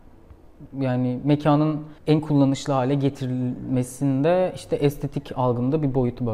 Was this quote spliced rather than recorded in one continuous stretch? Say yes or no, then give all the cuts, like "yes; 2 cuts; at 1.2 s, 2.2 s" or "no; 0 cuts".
yes; 1 cut; at 2.0 s